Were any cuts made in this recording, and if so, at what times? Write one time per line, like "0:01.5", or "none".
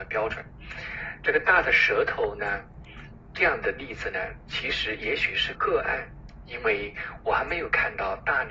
0:05.5